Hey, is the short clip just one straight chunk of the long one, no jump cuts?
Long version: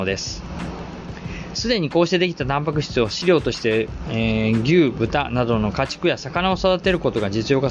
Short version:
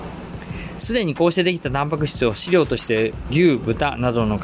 no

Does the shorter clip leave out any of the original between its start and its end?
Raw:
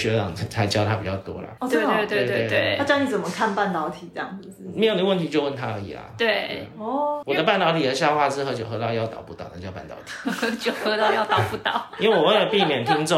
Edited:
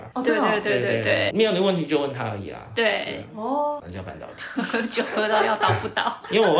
yes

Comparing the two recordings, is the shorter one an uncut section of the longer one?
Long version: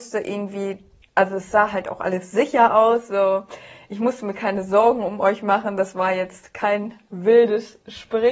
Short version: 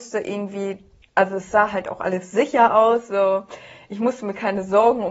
yes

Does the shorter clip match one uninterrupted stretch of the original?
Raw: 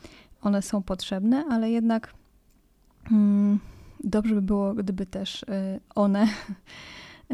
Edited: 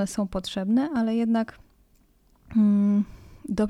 yes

